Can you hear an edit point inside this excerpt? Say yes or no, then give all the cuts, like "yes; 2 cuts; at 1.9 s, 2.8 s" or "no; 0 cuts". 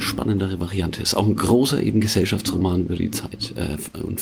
no; 0 cuts